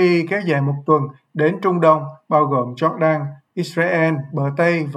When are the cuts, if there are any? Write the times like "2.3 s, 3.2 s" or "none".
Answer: none